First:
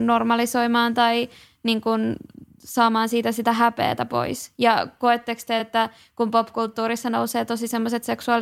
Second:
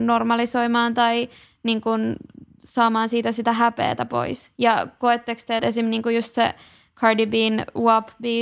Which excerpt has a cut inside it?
second; 1 cut; at 5.6 s

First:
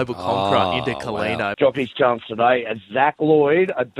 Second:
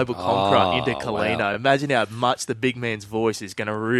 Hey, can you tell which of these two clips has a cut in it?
first; 1 cut; at 1.5 s

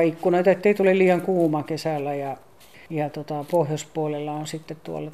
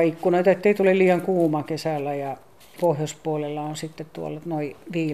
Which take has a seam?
second; 1 cut; at 2.8 s

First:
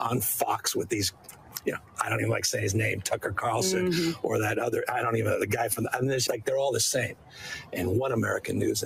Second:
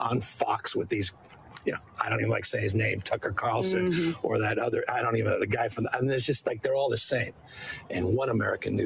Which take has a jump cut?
first; 1 cut; at 6.3 s

